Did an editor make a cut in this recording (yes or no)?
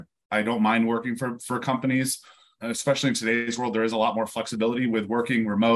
yes